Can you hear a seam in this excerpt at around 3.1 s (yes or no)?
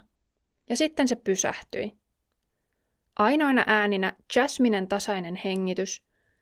yes